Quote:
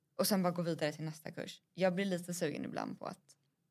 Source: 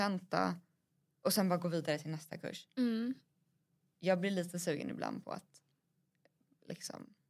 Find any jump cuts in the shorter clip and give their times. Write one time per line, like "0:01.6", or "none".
0:01.6